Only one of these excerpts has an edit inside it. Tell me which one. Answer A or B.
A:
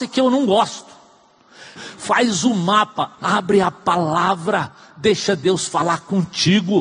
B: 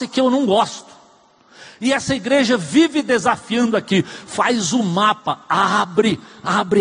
A